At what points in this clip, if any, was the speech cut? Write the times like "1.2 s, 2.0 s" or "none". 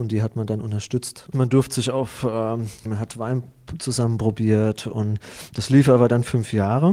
1.3 s, 2.8 s